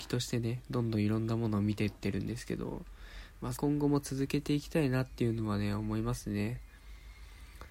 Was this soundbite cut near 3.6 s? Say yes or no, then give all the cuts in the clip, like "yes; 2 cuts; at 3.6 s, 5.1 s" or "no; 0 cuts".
yes; 1 cut; at 3.6 s